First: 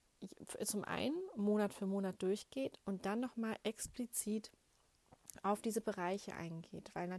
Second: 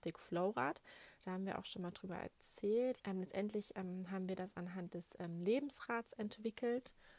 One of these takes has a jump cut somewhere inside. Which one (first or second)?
second